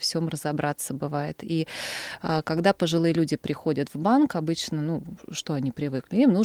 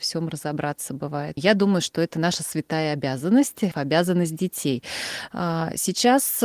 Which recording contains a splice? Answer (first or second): second